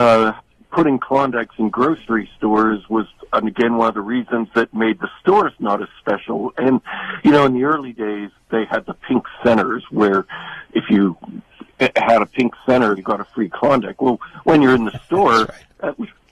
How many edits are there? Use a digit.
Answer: 1